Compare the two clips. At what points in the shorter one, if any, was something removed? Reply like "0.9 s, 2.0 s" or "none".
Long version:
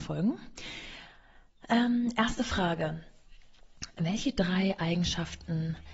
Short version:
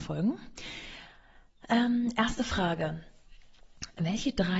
none